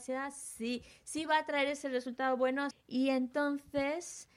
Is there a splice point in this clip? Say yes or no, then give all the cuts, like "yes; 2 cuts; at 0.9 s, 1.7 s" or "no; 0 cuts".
yes; 1 cut; at 2.7 s